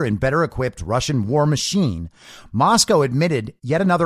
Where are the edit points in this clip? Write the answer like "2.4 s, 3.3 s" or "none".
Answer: none